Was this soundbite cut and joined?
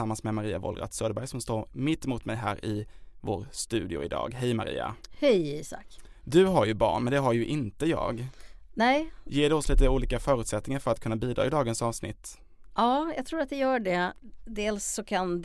no; 0 cuts

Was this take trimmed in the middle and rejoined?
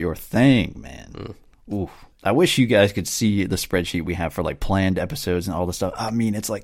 yes; 1 cut; at 2.1 s

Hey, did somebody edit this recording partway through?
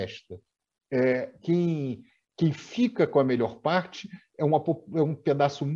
yes; 1 cut; at 1.4 s

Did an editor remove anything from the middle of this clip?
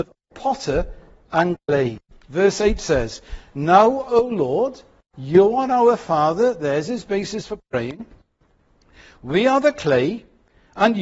no; 0 cuts

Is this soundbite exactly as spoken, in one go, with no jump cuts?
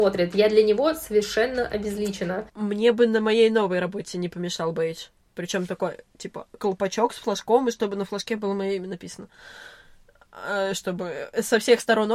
no; 1 cut; at 2.5 s

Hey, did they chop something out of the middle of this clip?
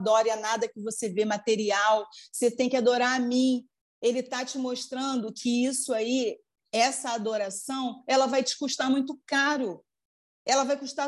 no; 0 cuts

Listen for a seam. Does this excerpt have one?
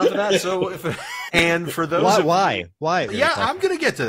yes; 2 cuts; at 1.3 s, 3.1 s

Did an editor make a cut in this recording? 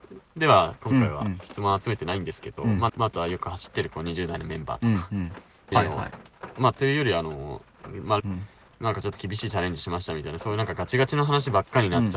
yes; 3 cuts; at 2.9 s, 5.7 s, 8.2 s

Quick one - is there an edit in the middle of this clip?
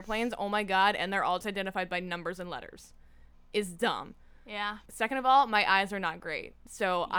yes; 2 cuts; at 1.4 s, 4.9 s

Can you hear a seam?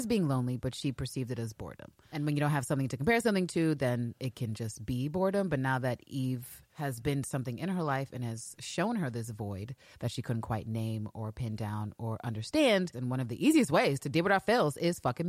yes; 1 cut; at 12.9 s

